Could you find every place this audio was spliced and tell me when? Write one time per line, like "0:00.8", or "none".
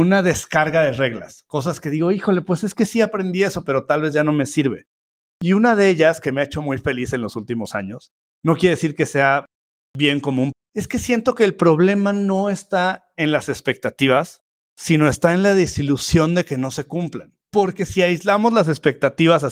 0:10.5
0:17.4